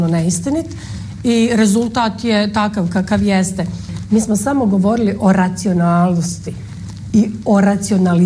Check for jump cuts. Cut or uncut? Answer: cut